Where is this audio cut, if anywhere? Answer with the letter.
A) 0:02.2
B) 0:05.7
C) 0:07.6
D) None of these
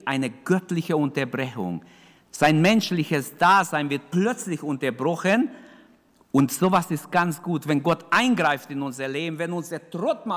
D